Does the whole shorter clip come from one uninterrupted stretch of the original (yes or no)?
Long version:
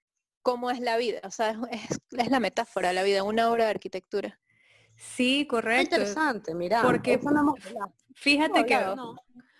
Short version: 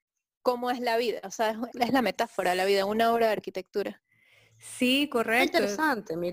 no